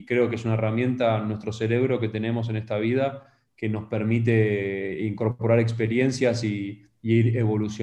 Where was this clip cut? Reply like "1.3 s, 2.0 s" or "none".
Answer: 3.5 s